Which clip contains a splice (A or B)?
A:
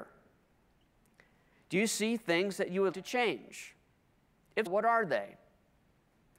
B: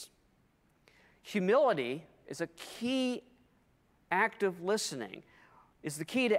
A